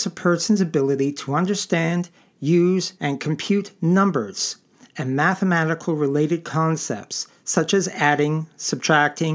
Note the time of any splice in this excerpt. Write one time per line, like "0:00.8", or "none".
0:03.0